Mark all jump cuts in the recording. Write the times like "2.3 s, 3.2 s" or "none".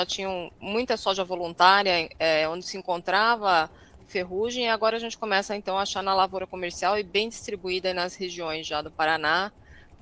none